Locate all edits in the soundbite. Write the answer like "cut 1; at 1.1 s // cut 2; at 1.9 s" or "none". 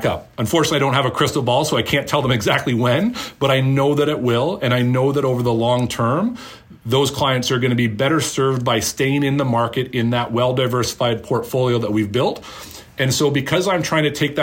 none